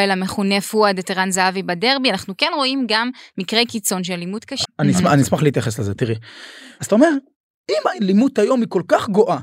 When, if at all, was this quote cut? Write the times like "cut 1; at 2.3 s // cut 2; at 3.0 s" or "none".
cut 1; at 4.6 s // cut 2; at 6.8 s